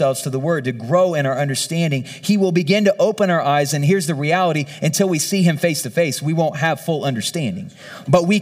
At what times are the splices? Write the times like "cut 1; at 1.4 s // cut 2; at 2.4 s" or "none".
none